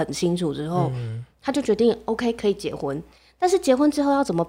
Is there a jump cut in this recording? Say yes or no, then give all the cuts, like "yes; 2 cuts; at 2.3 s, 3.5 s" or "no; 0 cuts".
no; 0 cuts